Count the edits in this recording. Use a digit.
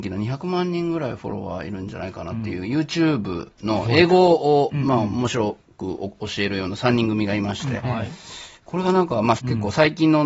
2